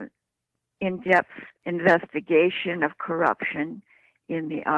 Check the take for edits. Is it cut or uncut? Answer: cut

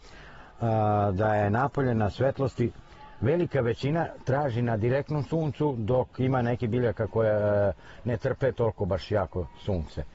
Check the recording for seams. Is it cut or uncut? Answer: uncut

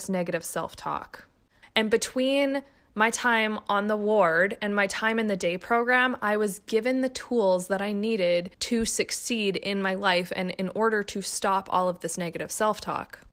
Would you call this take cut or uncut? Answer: cut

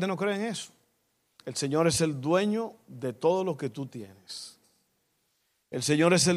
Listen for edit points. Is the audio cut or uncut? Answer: cut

